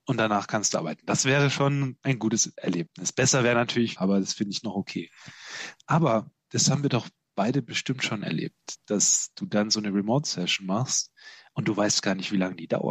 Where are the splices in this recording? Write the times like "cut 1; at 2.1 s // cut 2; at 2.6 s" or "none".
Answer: cut 1; at 4.0 s